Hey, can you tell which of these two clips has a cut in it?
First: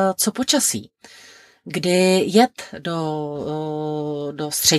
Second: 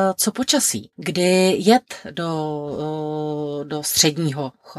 second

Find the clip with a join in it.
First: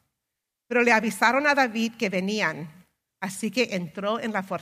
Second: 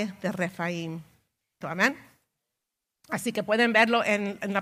second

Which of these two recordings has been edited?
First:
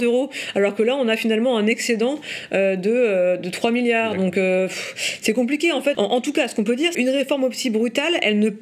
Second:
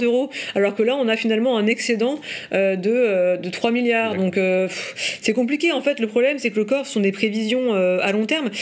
first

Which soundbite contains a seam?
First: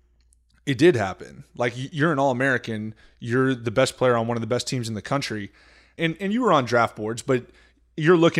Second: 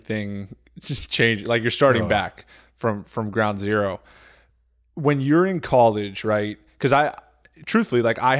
first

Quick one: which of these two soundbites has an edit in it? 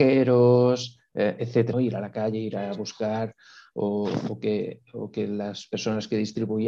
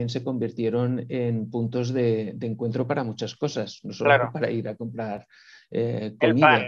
first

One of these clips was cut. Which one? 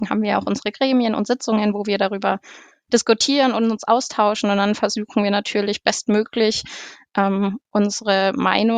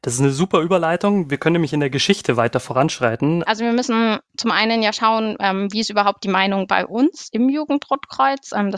second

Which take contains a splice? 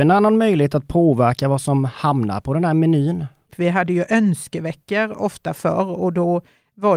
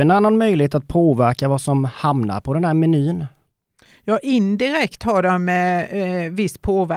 first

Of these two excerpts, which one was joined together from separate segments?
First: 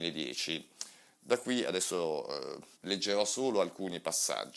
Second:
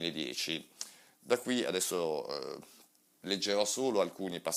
first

